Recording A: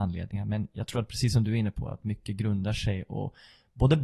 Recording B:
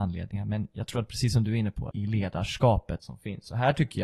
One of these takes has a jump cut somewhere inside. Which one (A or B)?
B